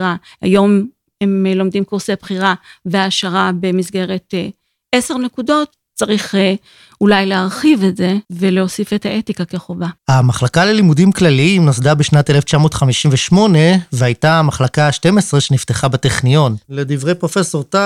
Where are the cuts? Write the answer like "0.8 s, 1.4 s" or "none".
8.2 s, 10.0 s, 16.6 s